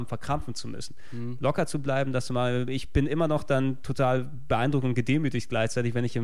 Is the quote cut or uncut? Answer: uncut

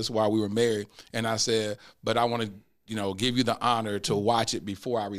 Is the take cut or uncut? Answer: uncut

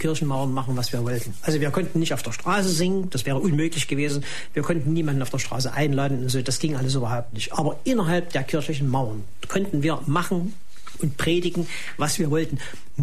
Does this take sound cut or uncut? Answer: uncut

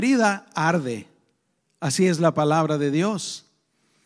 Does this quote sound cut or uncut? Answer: uncut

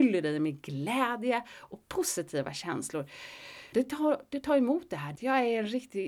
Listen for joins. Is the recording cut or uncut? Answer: cut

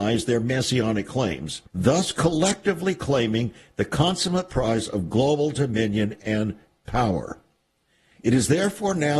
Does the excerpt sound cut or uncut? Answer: cut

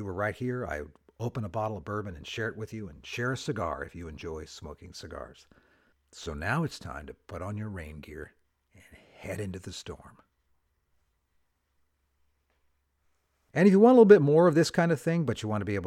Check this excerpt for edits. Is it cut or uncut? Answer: uncut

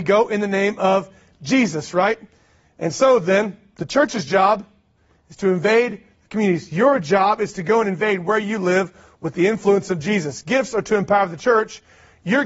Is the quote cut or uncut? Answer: uncut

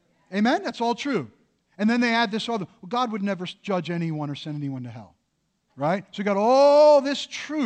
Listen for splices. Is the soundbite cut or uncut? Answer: cut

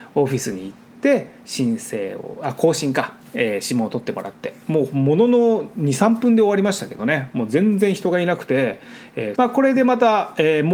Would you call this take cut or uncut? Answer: cut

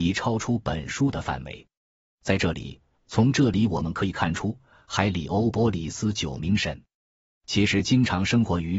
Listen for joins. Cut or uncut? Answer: cut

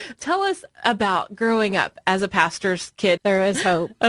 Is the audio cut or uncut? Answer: cut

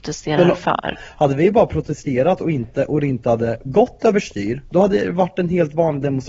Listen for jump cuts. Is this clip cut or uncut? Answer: cut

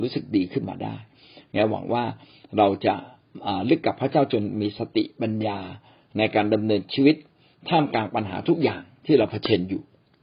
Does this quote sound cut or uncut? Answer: uncut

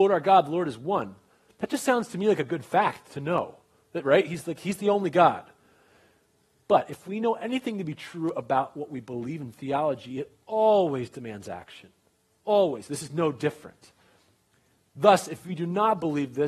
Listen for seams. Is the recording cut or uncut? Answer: uncut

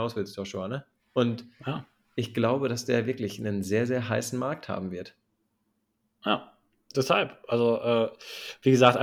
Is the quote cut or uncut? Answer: uncut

